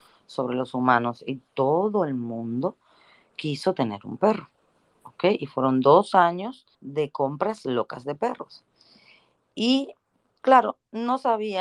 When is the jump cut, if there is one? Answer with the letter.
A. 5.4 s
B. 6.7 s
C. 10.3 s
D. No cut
B